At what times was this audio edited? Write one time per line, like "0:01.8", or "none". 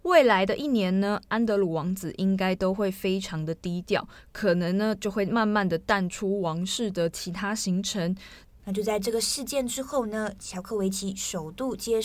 0:08.6